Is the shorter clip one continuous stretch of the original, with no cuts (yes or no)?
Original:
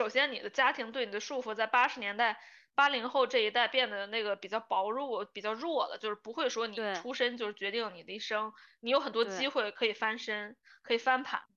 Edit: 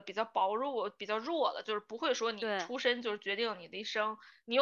yes